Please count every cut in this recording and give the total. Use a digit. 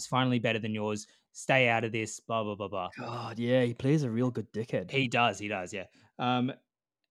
0